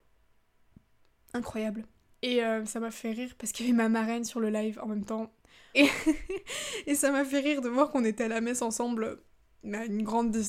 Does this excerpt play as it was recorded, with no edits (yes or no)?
no